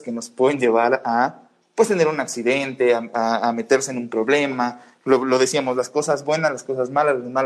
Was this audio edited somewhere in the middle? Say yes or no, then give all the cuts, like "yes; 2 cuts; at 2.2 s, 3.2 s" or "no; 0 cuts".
no; 0 cuts